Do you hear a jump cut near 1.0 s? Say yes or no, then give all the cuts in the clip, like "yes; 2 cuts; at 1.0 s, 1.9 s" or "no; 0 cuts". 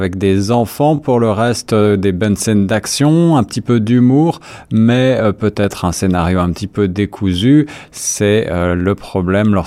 no; 0 cuts